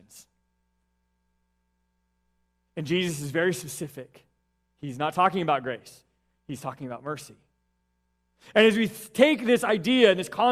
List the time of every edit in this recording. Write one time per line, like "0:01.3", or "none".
none